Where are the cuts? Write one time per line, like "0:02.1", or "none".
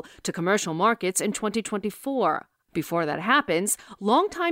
none